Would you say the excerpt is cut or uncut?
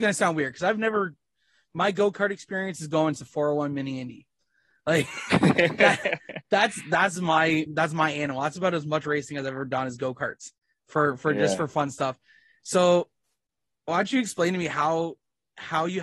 cut